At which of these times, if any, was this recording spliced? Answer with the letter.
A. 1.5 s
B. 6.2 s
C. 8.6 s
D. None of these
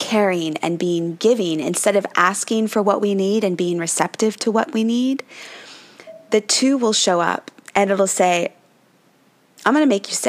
D